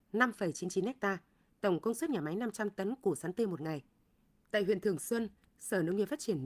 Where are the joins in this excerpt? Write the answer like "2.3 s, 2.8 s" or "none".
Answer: 4.3 s